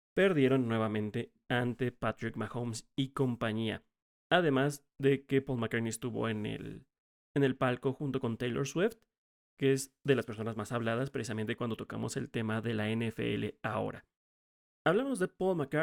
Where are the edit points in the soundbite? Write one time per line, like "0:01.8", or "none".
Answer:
none